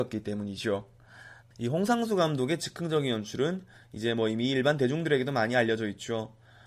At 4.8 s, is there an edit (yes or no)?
no